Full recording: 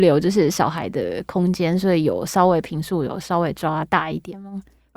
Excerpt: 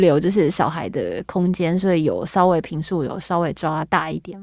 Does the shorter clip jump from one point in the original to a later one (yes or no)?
no